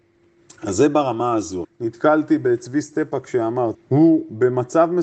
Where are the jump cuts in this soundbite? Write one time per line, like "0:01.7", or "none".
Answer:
0:01.6
0:03.7